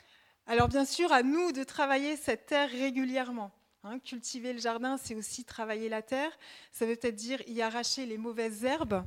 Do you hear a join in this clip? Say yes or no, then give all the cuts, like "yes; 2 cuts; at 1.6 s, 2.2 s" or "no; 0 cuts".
no; 0 cuts